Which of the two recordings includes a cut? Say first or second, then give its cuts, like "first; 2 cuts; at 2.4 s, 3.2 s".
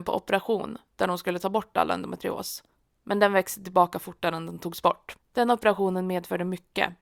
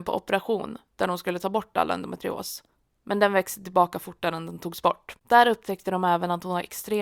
first; 1 cut; at 5.2 s